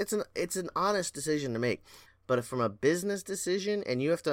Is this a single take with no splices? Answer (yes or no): no